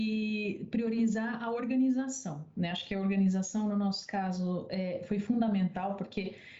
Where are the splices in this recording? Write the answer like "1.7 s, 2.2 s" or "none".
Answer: none

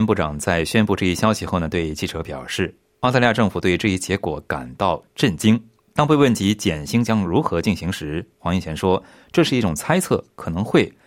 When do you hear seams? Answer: none

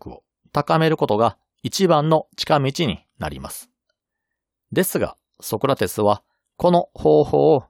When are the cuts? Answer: none

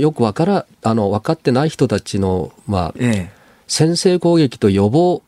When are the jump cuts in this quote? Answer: 2.9 s

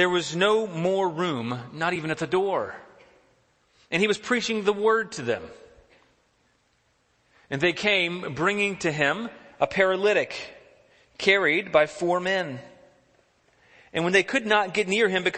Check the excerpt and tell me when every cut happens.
none

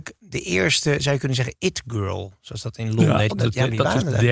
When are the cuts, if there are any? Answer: 3.3 s

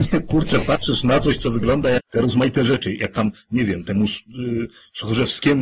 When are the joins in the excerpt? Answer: 2.0 s

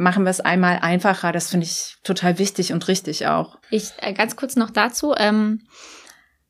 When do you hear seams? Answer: 3.6 s

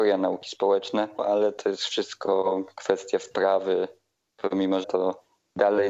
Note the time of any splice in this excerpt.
1.2 s, 4.8 s

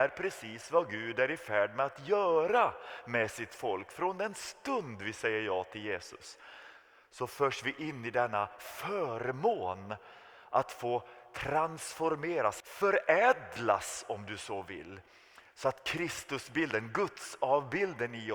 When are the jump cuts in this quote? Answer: 12.6 s

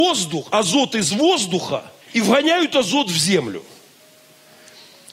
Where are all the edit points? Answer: 2.0 s

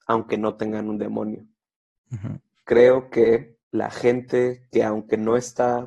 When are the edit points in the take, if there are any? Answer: 2.5 s, 3.6 s

